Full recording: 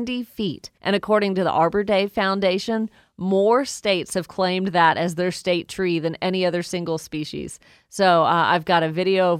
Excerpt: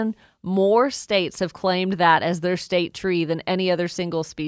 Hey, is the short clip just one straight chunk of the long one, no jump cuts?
yes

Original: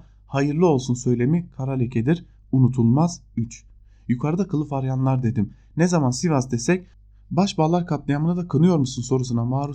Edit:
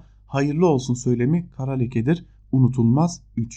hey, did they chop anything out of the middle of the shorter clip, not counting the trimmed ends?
no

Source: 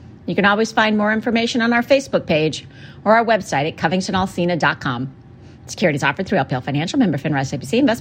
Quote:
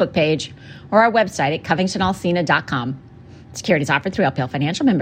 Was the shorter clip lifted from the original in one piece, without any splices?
yes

